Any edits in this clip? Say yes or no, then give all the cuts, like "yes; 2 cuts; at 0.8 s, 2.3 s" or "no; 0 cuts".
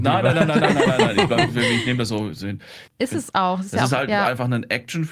yes; 1 cut; at 2.9 s